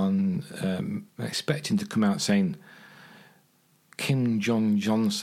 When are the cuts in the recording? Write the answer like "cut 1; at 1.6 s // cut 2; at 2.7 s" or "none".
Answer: cut 1; at 1.1 s